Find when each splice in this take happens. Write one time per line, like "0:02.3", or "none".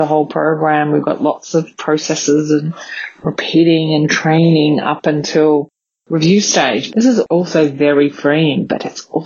0:06.9